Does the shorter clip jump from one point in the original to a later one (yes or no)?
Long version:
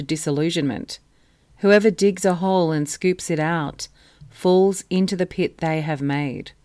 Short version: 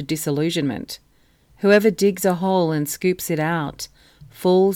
no